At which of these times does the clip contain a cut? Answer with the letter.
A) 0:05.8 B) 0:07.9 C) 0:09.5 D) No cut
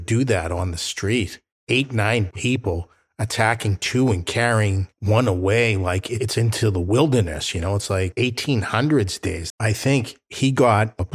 C